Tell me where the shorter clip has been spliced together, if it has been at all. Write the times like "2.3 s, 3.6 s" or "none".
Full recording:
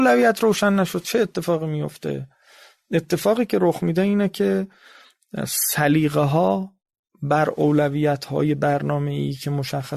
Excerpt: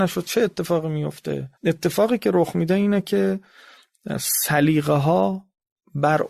1.6 s